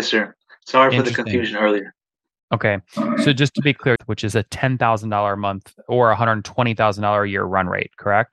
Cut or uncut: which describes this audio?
cut